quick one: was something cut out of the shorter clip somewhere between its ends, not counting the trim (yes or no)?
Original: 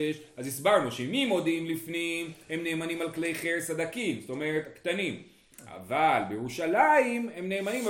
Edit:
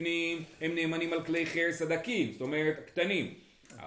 no